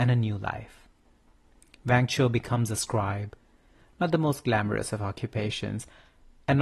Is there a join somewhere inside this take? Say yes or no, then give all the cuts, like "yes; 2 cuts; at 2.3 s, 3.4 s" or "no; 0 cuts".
no; 0 cuts